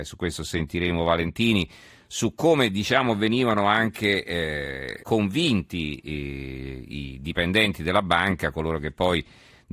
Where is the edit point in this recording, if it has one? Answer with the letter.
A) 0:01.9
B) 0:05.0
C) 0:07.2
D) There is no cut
B